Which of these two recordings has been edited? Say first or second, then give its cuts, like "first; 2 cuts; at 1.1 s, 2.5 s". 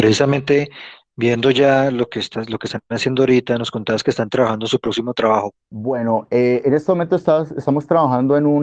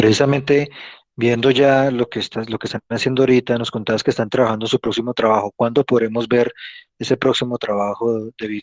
first; 1 cut; at 5.5 s